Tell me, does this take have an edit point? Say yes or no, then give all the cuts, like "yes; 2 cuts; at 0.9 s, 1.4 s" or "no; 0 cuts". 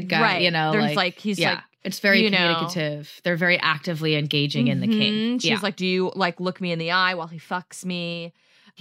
no; 0 cuts